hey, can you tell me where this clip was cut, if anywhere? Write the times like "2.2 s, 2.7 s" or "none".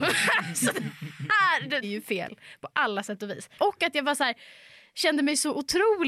1.8 s, 3.6 s